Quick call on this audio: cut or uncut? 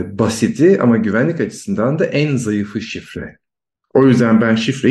uncut